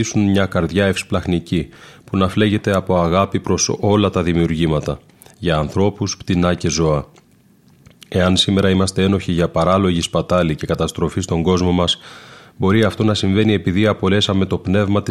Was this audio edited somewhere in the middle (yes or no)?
no